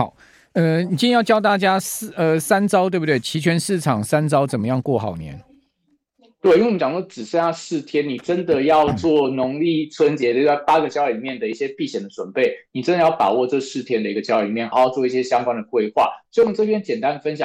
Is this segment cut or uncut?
cut